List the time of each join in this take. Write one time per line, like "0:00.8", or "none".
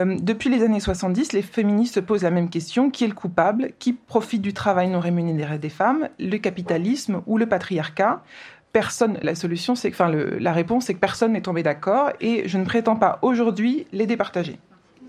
0:09.2